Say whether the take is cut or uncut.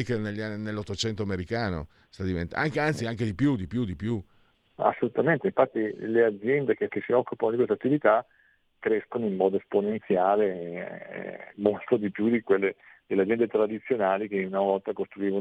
cut